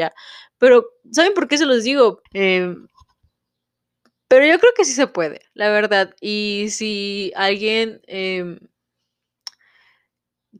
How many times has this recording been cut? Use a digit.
1